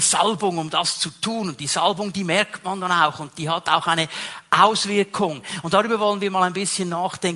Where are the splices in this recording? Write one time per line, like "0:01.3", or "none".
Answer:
none

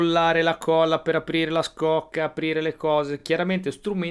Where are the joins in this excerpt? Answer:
none

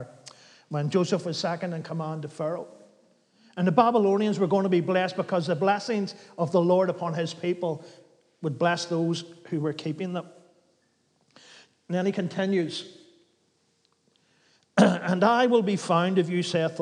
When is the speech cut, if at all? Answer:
none

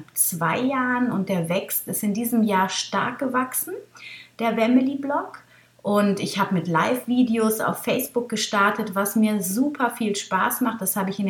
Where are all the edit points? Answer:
none

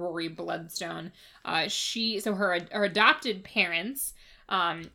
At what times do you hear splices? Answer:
none

